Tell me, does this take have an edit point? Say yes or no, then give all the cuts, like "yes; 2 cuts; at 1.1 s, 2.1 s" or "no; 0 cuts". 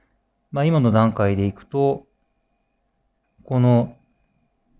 yes; 1 cut; at 3.2 s